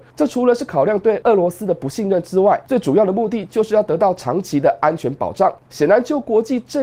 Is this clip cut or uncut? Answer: cut